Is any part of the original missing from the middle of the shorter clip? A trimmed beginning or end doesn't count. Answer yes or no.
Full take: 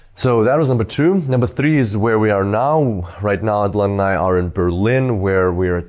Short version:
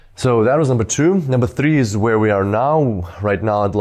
no